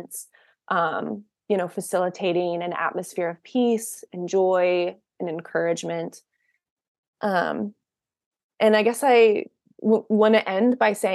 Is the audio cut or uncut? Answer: uncut